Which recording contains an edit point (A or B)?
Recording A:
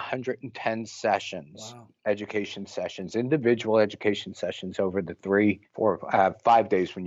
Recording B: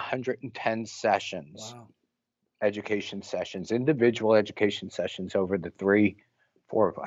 A